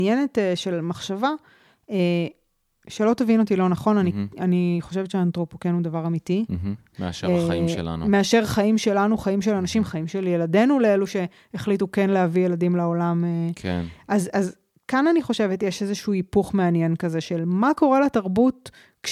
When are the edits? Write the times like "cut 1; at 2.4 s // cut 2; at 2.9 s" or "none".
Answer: cut 1; at 6.9 s